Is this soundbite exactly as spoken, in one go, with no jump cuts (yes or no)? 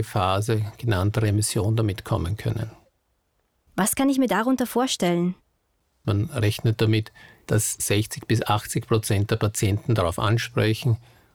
no